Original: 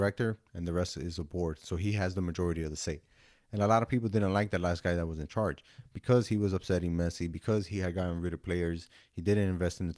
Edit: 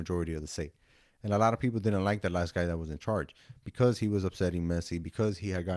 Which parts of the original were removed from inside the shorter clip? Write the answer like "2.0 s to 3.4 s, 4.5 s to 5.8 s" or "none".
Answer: none